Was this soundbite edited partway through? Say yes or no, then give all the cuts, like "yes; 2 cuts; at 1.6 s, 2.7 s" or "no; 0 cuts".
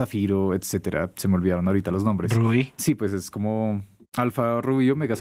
no; 0 cuts